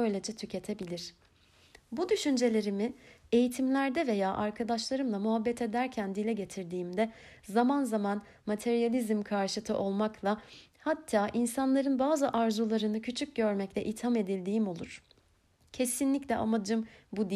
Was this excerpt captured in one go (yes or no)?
yes